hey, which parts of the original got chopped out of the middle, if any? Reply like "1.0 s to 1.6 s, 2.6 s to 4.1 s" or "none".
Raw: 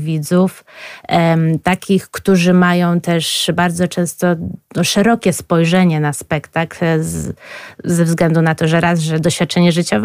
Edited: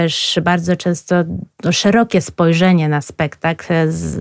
none